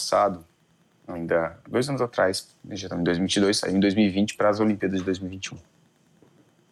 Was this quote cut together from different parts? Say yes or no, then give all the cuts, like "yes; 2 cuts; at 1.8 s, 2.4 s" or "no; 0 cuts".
no; 0 cuts